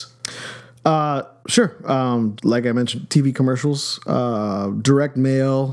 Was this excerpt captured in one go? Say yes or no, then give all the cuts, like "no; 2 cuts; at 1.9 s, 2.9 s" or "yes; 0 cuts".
no; 1 cut; at 2.4 s